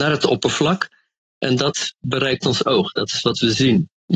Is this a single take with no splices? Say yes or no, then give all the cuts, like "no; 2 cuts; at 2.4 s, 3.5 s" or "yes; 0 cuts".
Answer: yes; 0 cuts